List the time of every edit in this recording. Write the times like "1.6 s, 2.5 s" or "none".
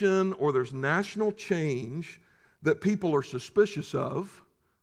none